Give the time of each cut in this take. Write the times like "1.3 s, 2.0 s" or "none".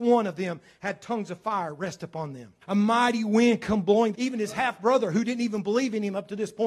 2.6 s, 4.1 s

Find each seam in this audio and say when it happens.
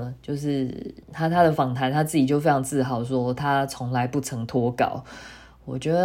1.0 s

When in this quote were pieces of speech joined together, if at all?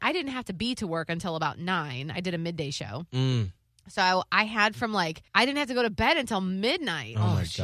5.3 s

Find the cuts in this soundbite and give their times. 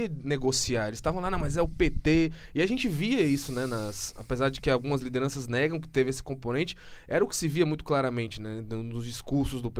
none

